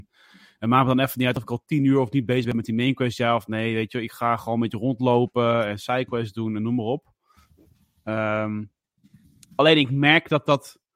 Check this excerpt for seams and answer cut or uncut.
uncut